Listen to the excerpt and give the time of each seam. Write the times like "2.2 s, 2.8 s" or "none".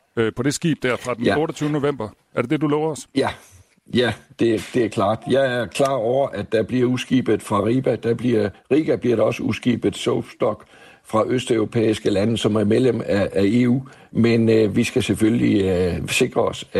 none